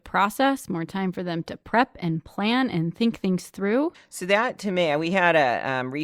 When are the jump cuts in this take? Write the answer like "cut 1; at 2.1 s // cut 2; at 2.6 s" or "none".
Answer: cut 1; at 3.9 s

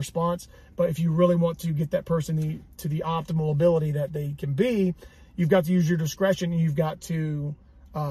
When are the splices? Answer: none

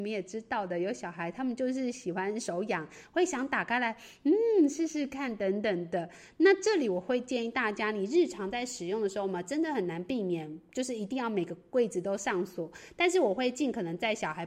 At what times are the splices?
none

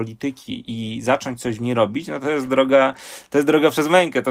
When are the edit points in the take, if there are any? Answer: none

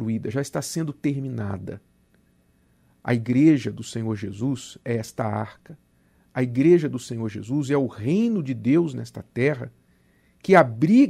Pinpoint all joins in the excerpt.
none

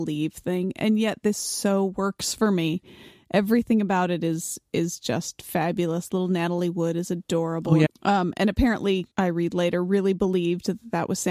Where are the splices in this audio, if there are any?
cut 1; at 7.9 s // cut 2; at 9.1 s

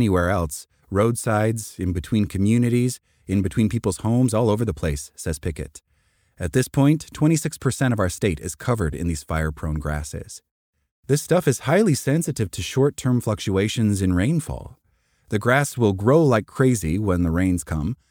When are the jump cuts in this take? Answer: none

